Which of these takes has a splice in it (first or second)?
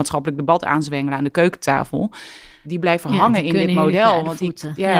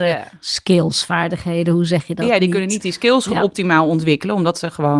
first